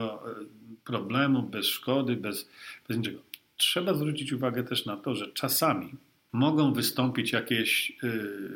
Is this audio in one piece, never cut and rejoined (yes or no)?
yes